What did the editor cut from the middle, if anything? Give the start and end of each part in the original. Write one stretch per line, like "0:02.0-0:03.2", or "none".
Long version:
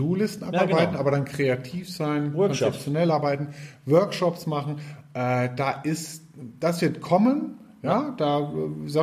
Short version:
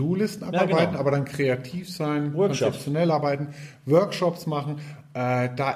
none